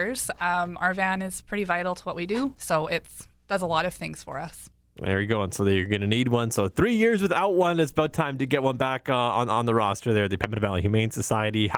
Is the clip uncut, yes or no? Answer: no